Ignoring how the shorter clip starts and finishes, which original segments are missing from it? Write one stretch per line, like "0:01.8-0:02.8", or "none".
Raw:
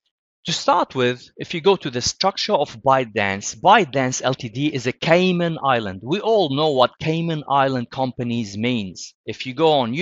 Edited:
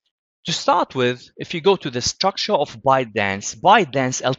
none

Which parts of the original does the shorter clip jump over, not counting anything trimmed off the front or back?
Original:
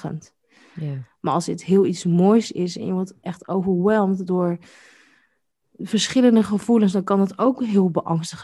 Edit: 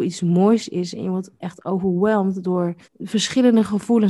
0:04.7-0:05.6

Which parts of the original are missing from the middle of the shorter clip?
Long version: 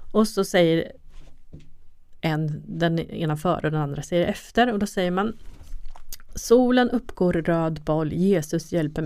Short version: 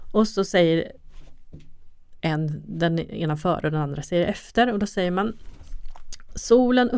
none

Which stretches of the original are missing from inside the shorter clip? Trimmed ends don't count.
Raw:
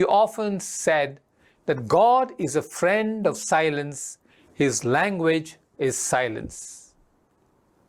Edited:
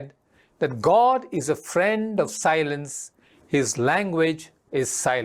none

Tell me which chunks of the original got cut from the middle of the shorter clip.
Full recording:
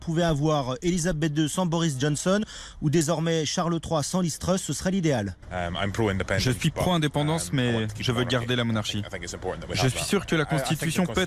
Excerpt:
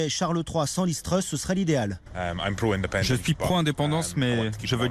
none

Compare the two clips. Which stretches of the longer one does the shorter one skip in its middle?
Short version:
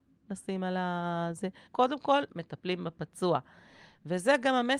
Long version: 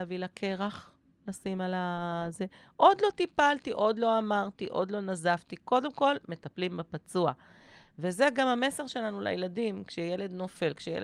0:02.6-0:05.6

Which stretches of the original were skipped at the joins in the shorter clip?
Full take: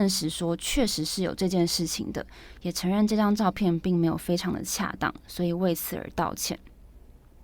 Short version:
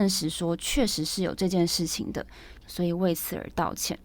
0:02.6-0:05.2

